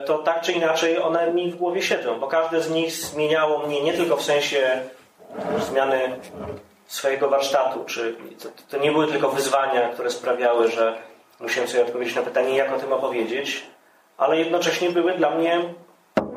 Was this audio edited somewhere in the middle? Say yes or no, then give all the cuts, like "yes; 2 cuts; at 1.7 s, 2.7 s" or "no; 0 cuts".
no; 0 cuts